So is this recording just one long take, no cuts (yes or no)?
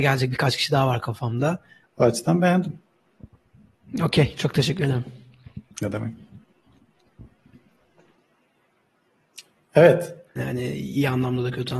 no